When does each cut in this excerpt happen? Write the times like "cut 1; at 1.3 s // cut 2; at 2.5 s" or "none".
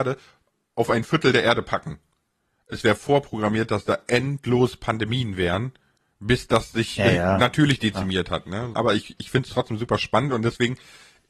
cut 1; at 8.7 s